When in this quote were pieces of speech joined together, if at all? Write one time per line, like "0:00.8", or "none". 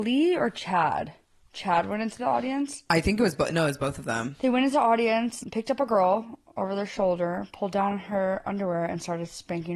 none

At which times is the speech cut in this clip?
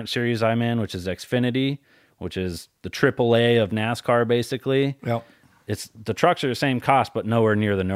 none

